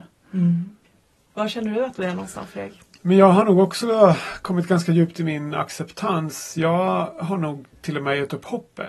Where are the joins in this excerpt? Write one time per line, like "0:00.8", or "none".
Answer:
none